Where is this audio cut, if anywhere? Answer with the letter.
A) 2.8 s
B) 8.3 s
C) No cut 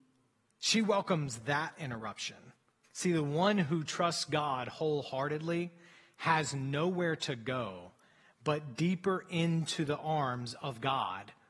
A